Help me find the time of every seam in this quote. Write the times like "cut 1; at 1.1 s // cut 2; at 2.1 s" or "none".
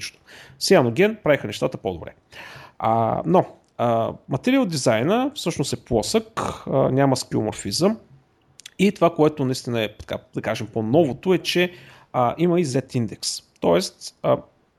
none